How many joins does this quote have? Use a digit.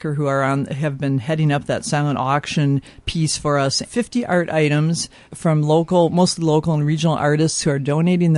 2